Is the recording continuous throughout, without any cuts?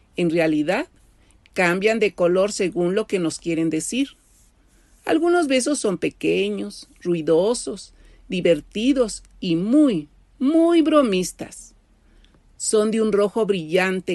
yes; 0 cuts

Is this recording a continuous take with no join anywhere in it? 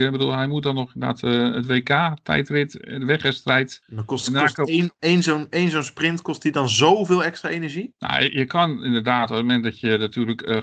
yes; 0 cuts

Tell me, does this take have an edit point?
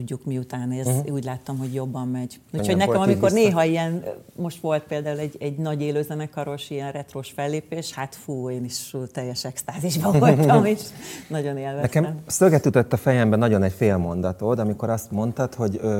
no; 0 cuts

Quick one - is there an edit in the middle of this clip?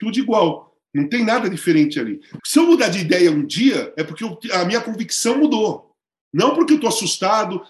yes; 1 cut; at 2.4 s

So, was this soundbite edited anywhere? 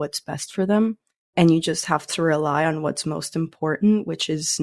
yes; 1 cut; at 1.2 s

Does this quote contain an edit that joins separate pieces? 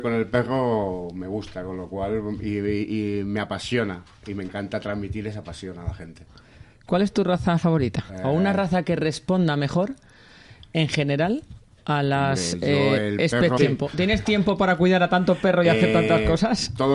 yes; 2 cuts; at 8.1 s, 13.6 s

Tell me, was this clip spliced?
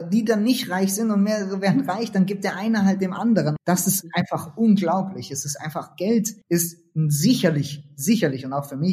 yes; 2 cuts; at 3.6 s, 6.4 s

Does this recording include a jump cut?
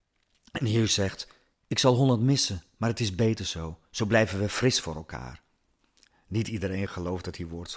no; 0 cuts

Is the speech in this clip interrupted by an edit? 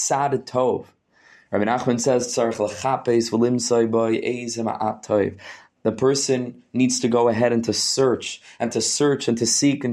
no; 0 cuts

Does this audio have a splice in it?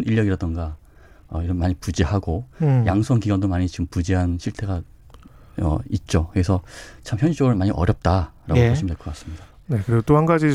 no; 0 cuts

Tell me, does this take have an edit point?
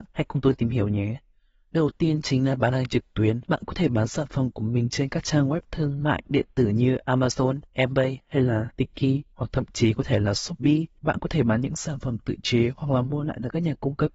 no; 0 cuts

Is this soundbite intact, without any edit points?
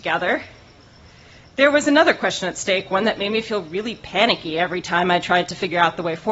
yes; 0 cuts

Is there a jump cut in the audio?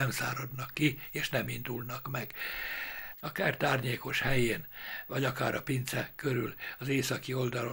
yes; 1 cut; at 3.1 s

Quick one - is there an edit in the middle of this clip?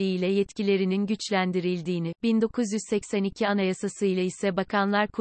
no; 0 cuts

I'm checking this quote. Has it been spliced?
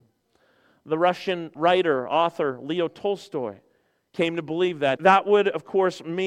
yes; 2 cuts; at 1.5 s, 5.0 s

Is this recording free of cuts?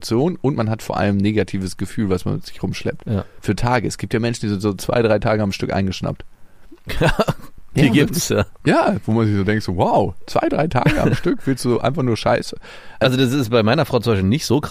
yes; 0 cuts

